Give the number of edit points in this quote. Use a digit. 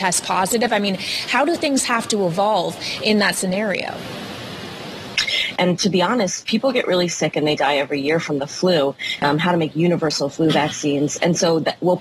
2